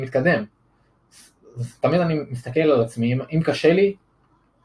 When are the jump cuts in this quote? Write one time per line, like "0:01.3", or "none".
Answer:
none